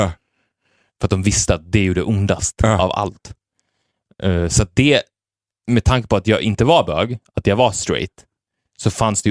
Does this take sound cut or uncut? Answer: uncut